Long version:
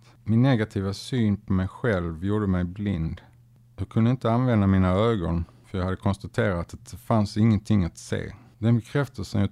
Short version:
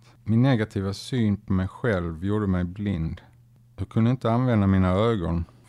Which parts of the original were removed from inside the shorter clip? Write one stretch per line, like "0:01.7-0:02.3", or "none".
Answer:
none